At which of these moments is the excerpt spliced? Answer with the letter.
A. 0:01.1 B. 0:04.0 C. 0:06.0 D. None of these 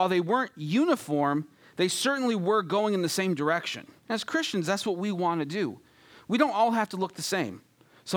B